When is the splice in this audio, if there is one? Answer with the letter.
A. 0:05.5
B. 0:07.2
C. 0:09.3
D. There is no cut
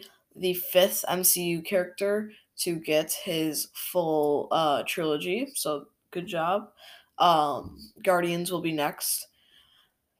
D